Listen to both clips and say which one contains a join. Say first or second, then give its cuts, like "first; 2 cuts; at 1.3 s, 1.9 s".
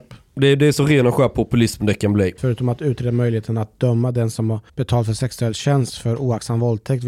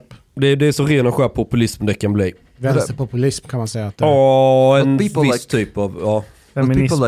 first; 2 cuts; at 2.4 s, 4.7 s